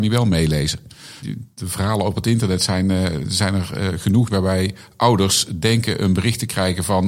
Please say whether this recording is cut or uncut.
cut